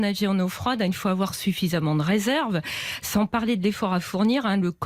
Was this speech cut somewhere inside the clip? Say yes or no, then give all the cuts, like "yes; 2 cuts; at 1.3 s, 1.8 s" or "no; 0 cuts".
no; 0 cuts